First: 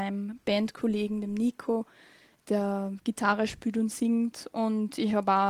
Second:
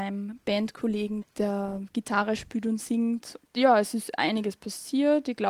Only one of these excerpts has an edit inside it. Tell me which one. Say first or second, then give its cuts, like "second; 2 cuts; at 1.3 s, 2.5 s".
second; 2 cuts; at 1.2 s, 3.4 s